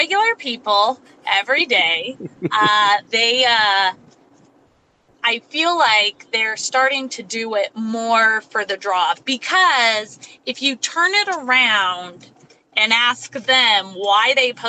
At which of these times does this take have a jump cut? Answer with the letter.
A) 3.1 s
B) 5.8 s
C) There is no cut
A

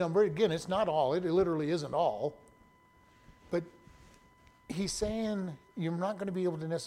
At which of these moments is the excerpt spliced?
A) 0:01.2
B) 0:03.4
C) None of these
B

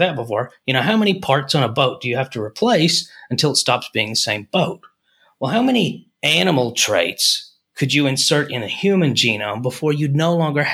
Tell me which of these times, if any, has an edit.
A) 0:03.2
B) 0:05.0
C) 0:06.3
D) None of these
D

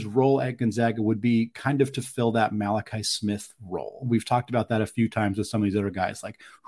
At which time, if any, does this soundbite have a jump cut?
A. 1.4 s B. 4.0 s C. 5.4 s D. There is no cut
D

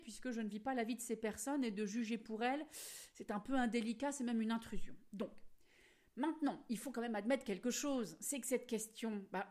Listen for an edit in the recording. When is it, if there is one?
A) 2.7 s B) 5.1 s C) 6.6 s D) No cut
D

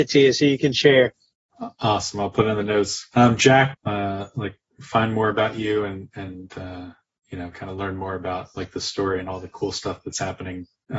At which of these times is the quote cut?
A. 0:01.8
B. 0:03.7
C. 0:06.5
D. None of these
B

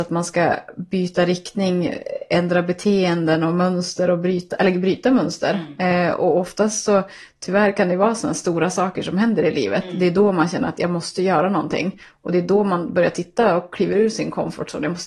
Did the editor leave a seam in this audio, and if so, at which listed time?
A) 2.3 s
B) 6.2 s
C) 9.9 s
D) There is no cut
D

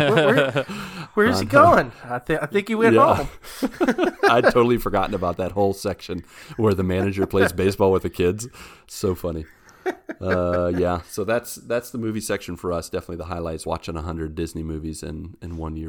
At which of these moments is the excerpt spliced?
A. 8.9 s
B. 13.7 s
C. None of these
C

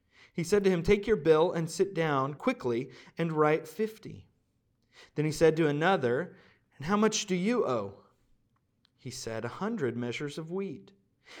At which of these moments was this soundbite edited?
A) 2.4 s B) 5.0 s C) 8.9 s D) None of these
A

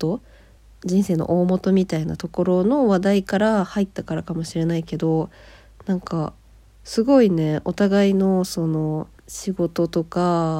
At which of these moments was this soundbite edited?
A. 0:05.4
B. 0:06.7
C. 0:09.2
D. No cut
C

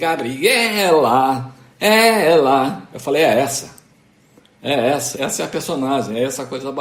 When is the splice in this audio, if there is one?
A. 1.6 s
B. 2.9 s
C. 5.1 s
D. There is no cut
C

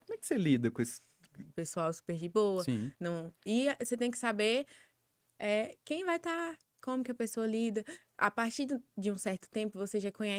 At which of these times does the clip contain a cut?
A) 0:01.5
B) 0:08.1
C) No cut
A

